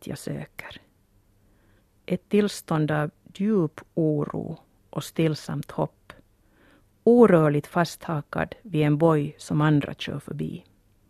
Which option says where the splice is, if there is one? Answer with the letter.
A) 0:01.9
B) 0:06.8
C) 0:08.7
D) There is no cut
D